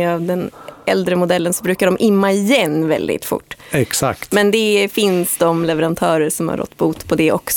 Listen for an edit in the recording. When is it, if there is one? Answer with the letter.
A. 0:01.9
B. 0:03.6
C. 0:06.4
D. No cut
D